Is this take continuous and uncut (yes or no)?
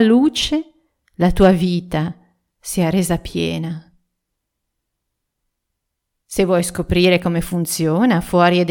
yes